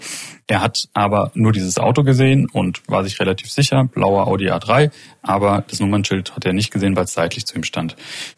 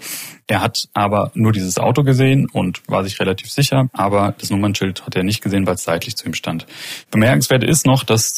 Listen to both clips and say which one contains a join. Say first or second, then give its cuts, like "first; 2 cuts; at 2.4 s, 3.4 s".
second; 1 cut; at 3.9 s